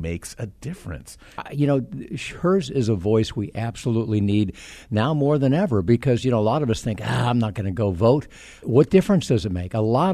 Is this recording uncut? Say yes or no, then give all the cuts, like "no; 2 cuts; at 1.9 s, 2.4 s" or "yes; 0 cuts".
no; 1 cut; at 1.4 s